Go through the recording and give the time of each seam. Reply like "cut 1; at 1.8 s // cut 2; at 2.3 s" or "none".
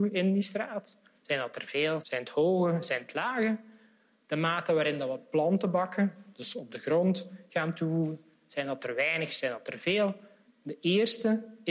cut 1; at 2.0 s // cut 2; at 10.4 s